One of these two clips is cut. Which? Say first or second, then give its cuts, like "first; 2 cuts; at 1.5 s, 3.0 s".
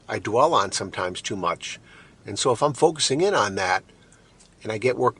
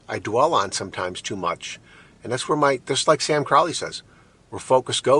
first; 1 cut; at 2.2 s